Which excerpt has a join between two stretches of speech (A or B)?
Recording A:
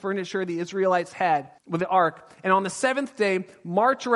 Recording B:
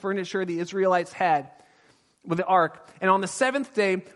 A